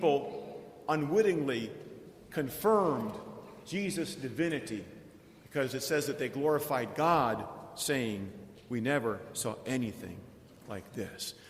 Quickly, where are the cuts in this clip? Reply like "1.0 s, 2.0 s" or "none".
none